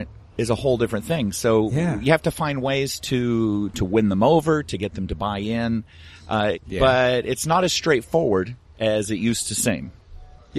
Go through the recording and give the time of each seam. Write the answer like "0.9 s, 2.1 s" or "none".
3.7 s, 6.6 s

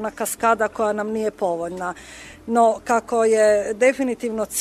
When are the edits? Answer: none

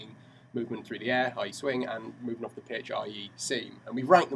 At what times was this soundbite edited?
none

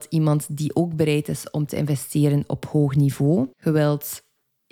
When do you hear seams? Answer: 3.5 s

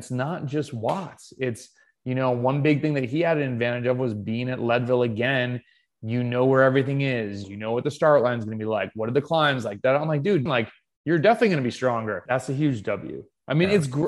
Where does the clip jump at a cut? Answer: 7.4 s, 10.5 s, 12.3 s

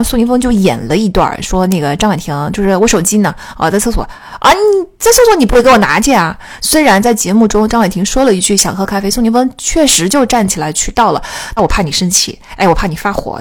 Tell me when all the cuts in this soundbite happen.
6.6 s, 11.6 s

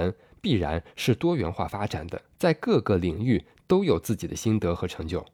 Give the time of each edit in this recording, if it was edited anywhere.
2.3 s

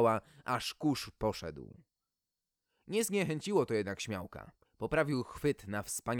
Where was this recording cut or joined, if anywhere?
4.6 s

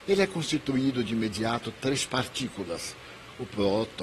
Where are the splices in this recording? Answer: none

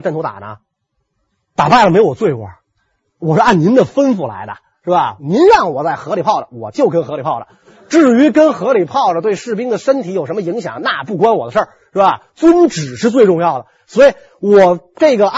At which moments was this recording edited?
5.2 s

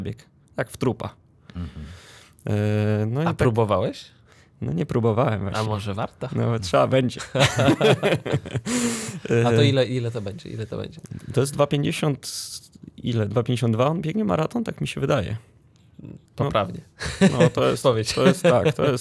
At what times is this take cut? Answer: 16.3 s, 17.8 s

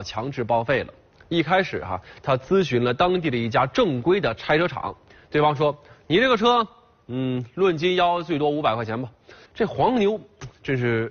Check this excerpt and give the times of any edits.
9.5 s

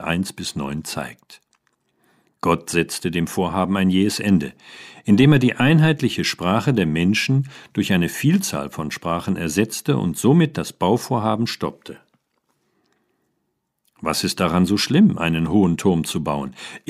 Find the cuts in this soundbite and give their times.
none

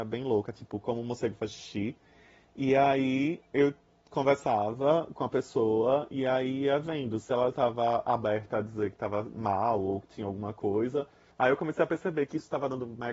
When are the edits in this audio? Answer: 11.3 s

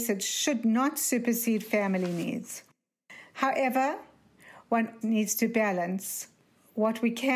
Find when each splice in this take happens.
3.3 s, 5.0 s

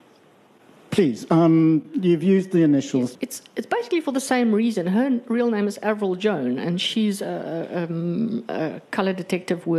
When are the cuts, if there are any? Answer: 3.2 s

